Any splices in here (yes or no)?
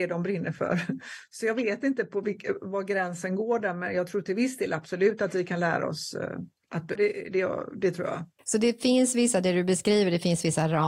yes